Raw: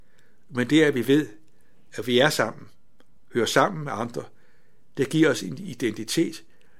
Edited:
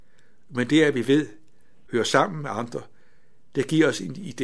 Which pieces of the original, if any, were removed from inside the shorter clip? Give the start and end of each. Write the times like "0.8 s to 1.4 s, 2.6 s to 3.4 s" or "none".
1.9 s to 3.3 s